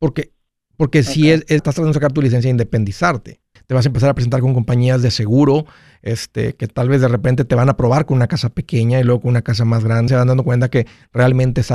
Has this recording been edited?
yes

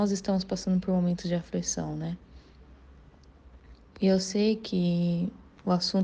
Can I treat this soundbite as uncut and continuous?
yes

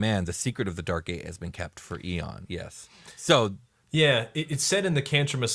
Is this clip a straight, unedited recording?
no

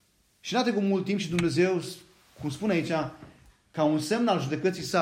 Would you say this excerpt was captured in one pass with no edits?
yes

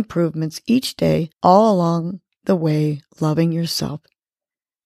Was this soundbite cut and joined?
yes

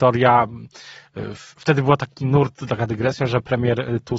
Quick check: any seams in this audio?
no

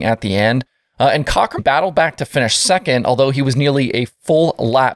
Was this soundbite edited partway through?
yes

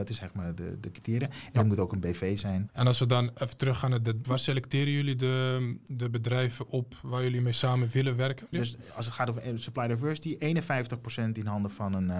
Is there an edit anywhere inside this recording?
yes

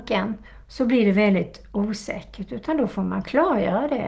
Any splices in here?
no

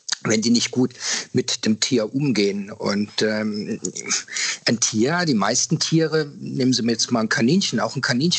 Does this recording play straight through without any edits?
yes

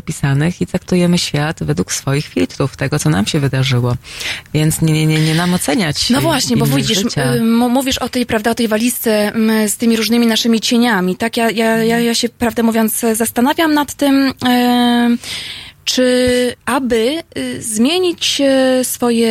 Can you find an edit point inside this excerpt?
yes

